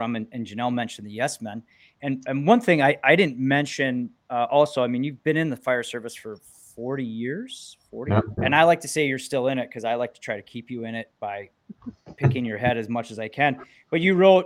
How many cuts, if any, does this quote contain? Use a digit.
1